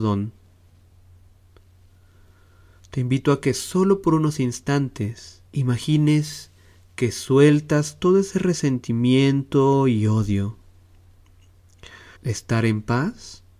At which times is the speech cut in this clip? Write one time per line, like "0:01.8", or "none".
0:05.5
0:12.2